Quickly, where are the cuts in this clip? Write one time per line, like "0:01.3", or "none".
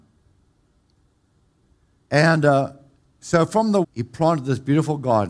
0:02.0
0:03.8